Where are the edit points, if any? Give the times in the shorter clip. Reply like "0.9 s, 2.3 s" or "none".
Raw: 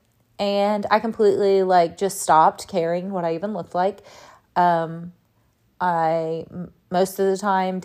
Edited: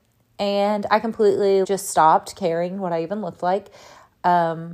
1.6 s